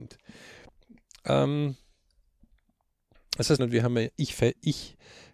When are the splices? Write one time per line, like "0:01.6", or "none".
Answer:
0:03.6